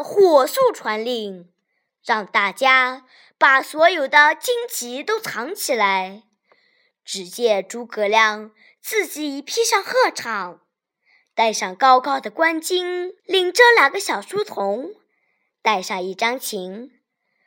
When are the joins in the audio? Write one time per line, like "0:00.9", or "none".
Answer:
0:06.9
0:13.2